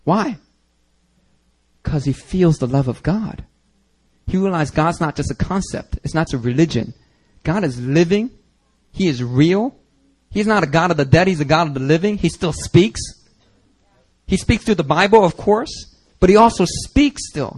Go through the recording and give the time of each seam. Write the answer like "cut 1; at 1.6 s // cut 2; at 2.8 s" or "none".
cut 1; at 6.3 s